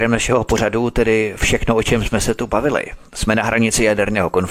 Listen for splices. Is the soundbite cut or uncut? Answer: uncut